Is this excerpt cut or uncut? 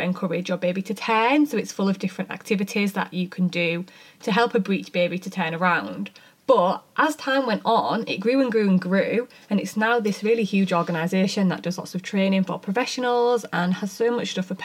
uncut